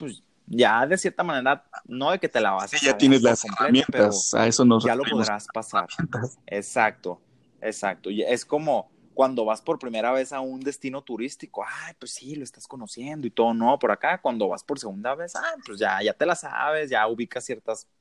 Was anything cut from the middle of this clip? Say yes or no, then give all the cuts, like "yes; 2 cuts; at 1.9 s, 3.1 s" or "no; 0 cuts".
no; 0 cuts